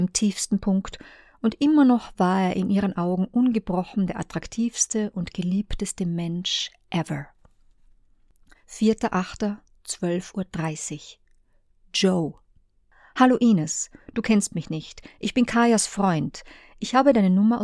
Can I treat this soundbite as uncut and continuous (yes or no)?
yes